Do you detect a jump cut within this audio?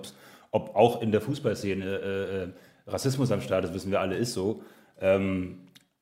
no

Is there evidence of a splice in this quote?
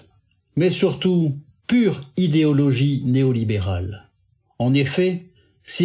no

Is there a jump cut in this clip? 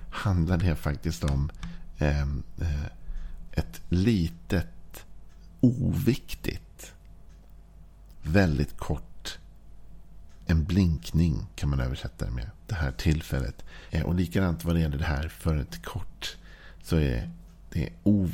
yes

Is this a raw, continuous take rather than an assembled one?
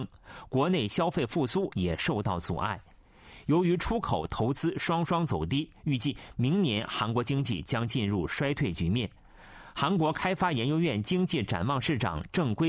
yes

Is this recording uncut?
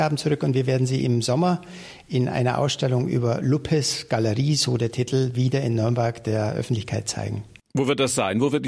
yes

